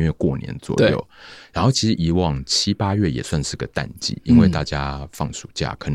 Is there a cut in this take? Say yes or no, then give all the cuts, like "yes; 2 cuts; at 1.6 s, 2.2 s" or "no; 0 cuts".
no; 0 cuts